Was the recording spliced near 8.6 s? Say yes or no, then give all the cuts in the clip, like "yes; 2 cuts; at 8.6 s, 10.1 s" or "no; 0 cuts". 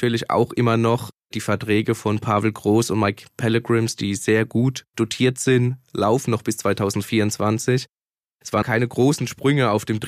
yes; 1 cut; at 8.6 s